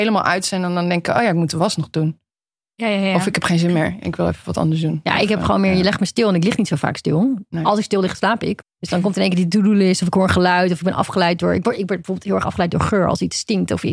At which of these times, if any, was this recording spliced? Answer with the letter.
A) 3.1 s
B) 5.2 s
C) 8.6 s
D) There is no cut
C